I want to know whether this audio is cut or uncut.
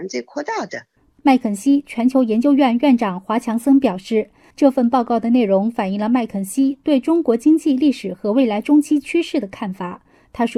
uncut